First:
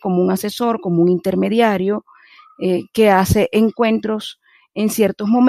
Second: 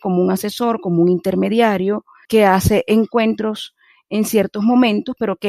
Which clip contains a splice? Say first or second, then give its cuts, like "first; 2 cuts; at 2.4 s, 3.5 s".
second; 1 cut; at 2.2 s